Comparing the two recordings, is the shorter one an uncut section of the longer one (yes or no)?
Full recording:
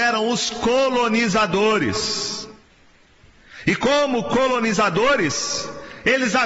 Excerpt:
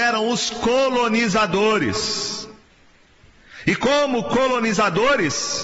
yes